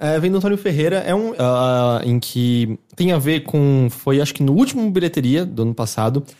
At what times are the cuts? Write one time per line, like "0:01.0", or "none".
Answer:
0:01.4